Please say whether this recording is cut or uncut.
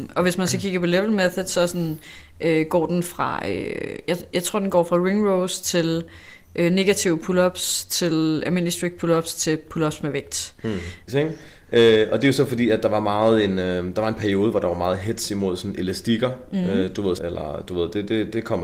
cut